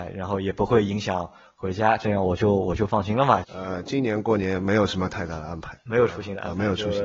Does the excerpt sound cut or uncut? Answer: cut